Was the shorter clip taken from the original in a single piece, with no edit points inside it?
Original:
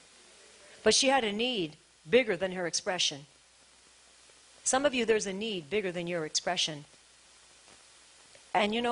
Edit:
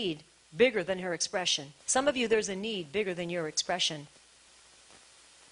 no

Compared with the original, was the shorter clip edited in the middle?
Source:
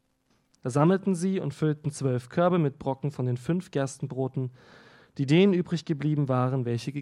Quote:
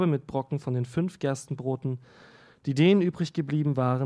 no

